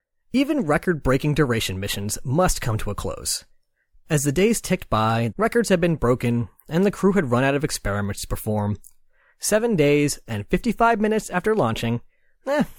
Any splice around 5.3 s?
yes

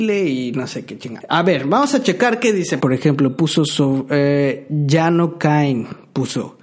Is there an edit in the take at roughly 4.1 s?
no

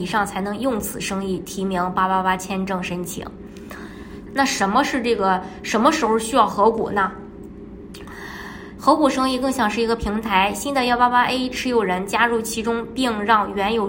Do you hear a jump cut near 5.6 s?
no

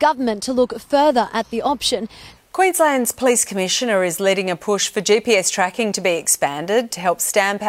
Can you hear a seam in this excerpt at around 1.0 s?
no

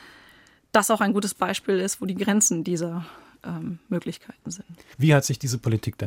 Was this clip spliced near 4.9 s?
yes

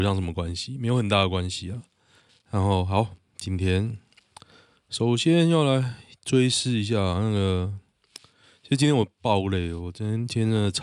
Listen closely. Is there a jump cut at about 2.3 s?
yes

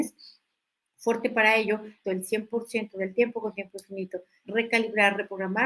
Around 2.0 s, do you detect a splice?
yes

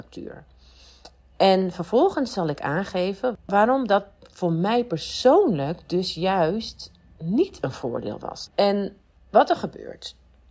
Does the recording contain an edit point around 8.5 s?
yes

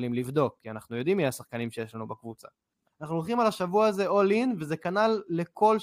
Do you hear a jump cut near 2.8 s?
yes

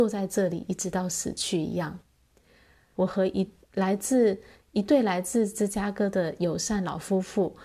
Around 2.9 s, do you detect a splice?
yes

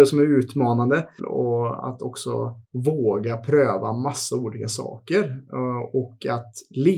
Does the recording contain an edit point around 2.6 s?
yes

